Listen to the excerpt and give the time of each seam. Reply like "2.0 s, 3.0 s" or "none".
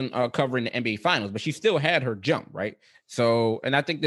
2.9 s